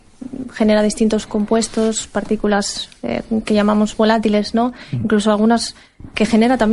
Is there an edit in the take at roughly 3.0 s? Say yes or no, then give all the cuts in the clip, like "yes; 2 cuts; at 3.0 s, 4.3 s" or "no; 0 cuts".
no; 0 cuts